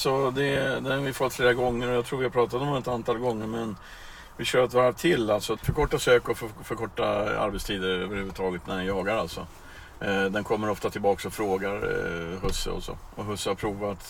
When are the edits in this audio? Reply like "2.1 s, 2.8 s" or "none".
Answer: 5.6 s